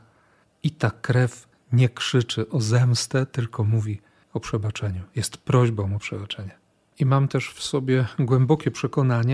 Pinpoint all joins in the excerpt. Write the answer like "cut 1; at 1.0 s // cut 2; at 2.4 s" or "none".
cut 1; at 6.9 s